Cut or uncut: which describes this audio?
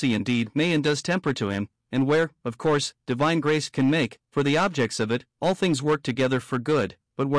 uncut